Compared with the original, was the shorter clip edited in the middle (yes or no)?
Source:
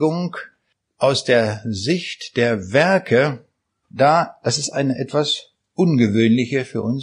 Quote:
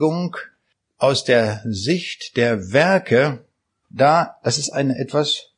no